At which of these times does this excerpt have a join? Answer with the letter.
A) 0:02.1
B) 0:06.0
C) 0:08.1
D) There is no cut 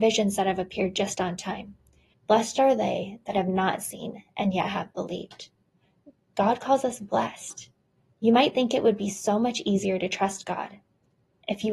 A